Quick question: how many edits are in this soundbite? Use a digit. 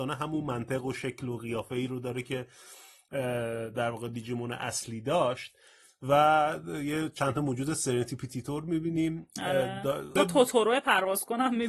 1